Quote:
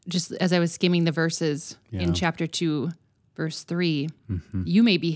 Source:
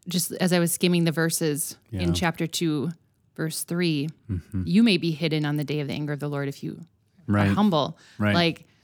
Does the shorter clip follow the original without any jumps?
yes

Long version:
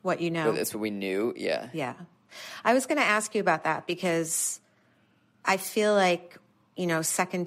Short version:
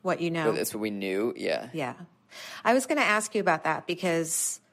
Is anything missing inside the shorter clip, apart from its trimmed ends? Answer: no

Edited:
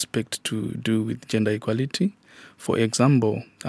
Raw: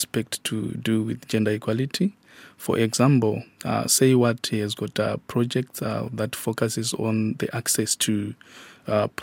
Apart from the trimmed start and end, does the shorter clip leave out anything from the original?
no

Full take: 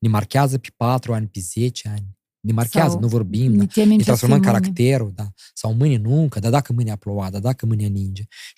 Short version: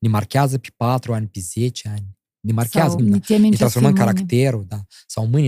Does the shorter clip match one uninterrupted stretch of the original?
no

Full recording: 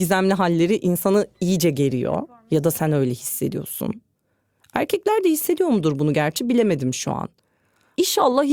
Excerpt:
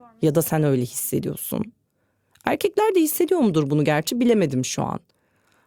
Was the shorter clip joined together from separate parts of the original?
no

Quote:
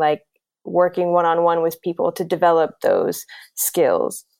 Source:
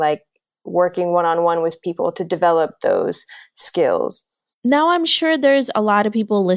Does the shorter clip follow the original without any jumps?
yes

